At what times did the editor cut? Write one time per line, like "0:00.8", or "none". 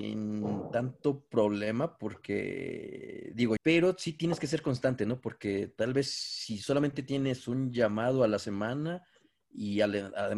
0:03.6